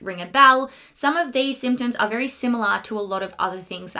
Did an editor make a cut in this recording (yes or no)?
no